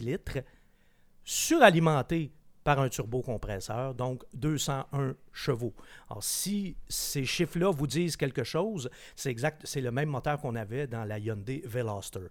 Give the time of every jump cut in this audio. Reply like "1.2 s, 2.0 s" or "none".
none